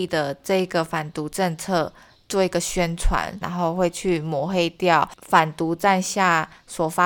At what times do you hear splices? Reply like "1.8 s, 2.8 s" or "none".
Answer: 3.4 s